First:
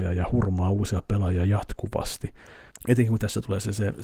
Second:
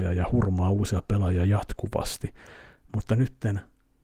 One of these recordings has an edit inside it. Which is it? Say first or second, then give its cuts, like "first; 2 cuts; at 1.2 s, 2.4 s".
first; 1 cut; at 2.7 s